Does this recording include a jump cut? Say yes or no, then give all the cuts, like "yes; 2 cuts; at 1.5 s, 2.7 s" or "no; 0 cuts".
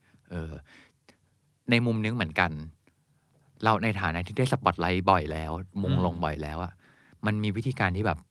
no; 0 cuts